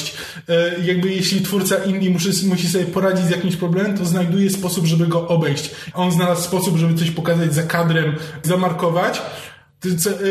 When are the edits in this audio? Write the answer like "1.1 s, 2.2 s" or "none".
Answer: 5.9 s, 8.4 s